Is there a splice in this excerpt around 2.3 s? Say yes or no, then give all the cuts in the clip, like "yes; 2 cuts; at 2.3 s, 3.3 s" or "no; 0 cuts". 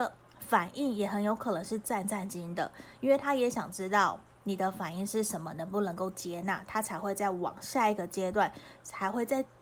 yes; 1 cut; at 2.3 s